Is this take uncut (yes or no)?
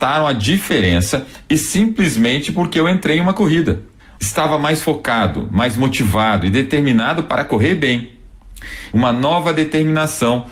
no